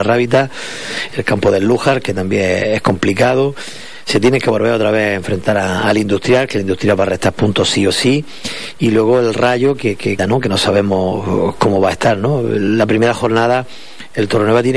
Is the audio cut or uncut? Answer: cut